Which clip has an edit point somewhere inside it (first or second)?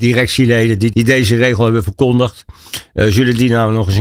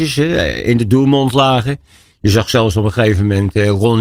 first